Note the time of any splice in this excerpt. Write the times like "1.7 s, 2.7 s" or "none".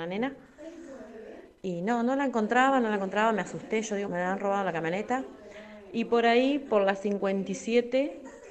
4.0 s